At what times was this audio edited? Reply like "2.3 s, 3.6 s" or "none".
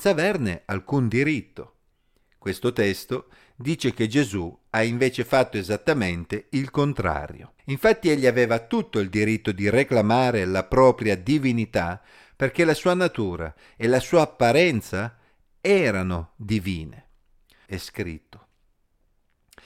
7.6 s, 17.7 s